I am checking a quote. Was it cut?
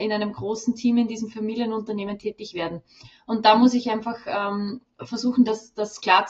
no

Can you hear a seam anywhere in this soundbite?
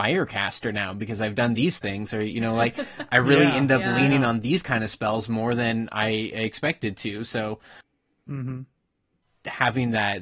no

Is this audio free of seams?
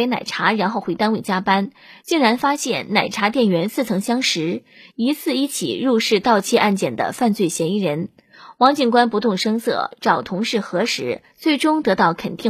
no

